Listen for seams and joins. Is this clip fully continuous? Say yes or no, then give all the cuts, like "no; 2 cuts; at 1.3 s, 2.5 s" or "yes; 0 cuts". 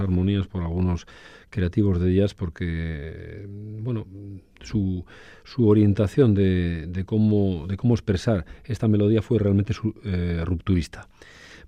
yes; 0 cuts